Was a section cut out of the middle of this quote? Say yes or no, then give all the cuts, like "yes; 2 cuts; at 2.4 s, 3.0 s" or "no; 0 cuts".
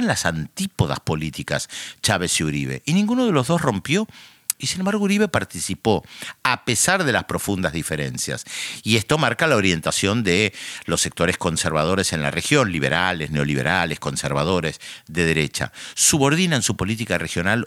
yes; 1 cut; at 4.5 s